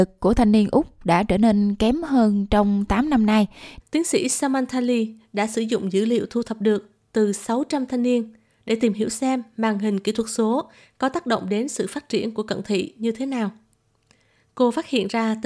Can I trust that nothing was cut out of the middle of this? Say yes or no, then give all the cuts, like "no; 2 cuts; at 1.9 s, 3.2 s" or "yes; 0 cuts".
no; 1 cut; at 3.8 s